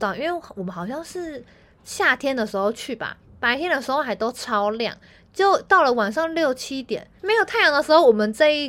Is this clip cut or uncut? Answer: uncut